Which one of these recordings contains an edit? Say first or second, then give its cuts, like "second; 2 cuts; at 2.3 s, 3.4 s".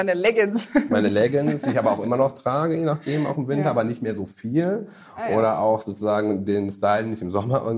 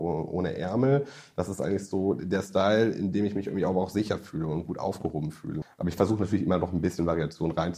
second; 1 cut; at 5.6 s